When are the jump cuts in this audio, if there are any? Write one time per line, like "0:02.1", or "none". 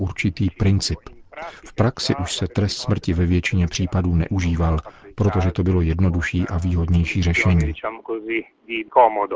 none